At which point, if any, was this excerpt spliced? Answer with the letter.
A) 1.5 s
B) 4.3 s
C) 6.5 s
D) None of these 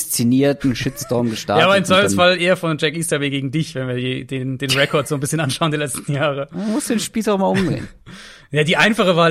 D